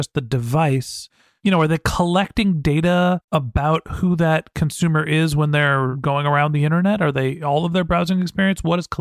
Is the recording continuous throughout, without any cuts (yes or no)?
yes